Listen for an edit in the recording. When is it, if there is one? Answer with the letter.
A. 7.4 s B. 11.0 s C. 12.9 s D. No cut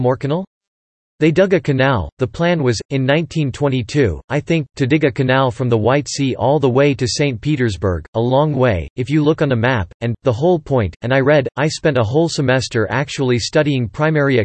B